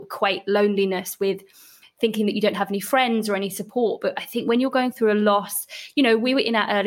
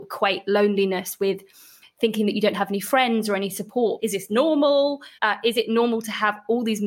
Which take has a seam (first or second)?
second